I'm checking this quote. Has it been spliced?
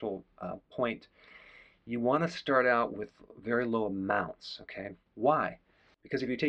yes; 1 cut; at 5.1 s

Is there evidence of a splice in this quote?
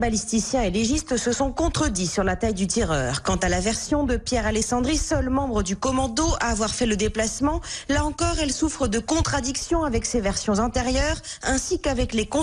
no; 0 cuts

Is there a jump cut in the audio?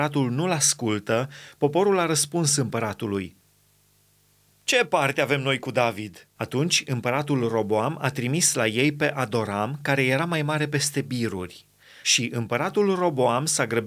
yes; 2 cuts; at 6.4 s, 12.0 s

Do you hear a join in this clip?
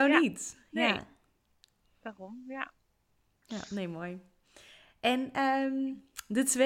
no; 0 cuts

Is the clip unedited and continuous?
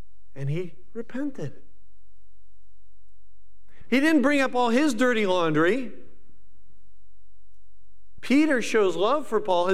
no; 2 cuts; at 3.8 s, 8.2 s

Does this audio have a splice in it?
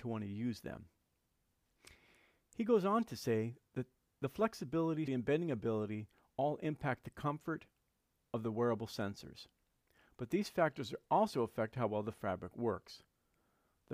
yes; 1 cut; at 5.1 s

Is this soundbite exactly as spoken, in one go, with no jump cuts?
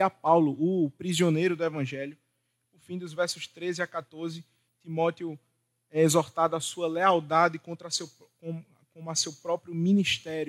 yes; 0 cuts

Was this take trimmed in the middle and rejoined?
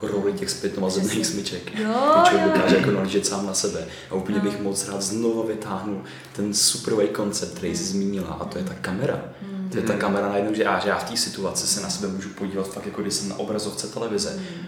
no; 0 cuts

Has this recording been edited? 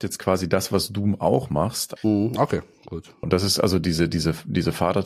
yes; 2 cuts; at 2.0 s, 3.2 s

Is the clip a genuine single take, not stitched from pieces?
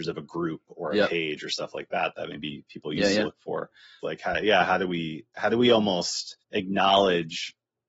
no; 2 cuts; at 4.0 s, 6.4 s

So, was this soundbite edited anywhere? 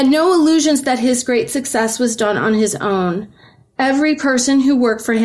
no; 0 cuts

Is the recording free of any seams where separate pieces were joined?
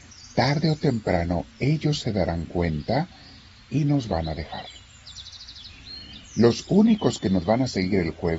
yes; 0 cuts

